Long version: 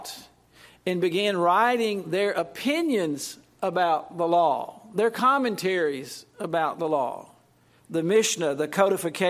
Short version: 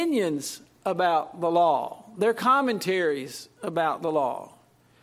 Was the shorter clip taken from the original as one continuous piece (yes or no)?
yes